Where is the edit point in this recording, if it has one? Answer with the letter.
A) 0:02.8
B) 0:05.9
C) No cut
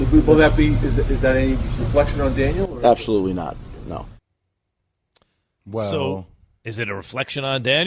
C